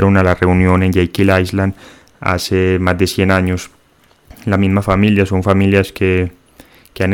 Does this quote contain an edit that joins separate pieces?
no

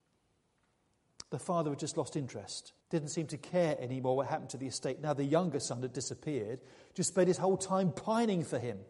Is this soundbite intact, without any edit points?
no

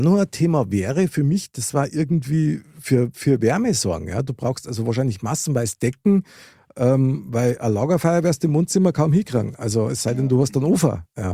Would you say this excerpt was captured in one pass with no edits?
yes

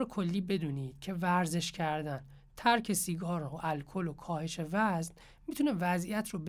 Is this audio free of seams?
yes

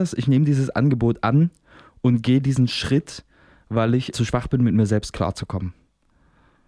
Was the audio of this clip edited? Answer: yes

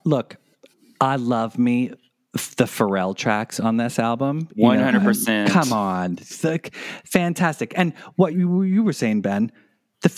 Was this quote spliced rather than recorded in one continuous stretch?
yes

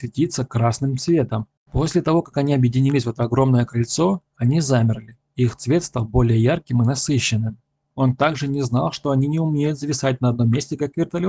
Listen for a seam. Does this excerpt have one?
yes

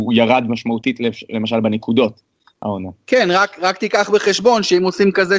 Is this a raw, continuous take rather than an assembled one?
yes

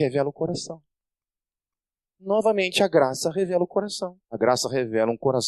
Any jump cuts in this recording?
yes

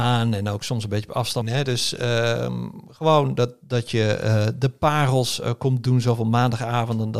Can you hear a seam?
yes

